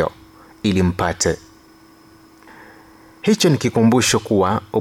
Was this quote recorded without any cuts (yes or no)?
no